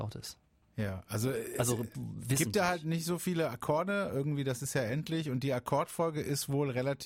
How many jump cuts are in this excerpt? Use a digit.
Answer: 0